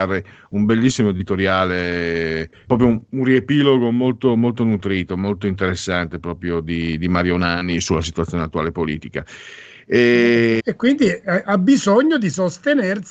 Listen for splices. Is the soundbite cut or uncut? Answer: cut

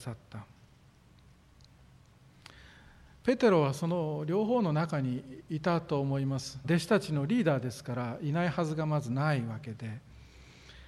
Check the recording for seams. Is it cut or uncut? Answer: cut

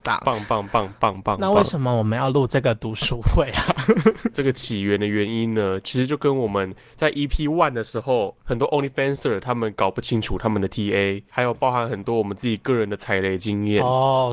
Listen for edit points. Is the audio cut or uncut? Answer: uncut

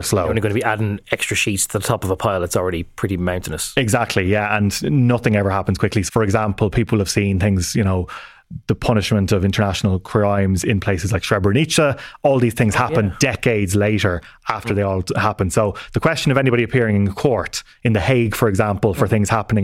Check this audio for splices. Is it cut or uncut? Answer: cut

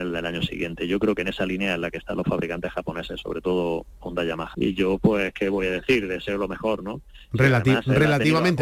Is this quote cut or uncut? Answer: cut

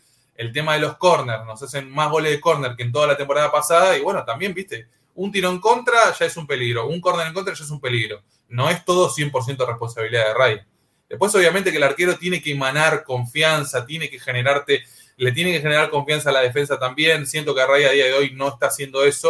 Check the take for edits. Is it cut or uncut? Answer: uncut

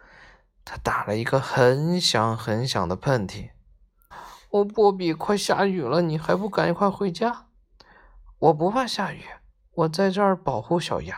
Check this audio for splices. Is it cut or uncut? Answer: cut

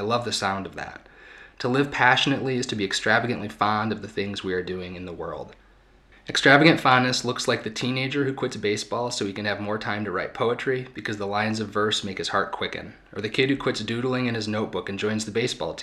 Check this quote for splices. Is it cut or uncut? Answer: uncut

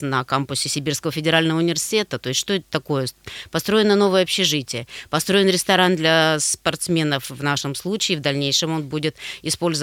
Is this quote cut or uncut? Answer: uncut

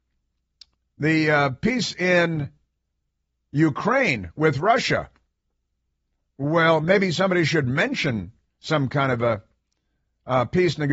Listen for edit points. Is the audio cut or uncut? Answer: uncut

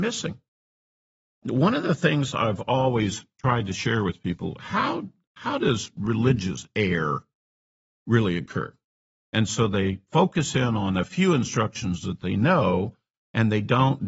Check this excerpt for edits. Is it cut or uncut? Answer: cut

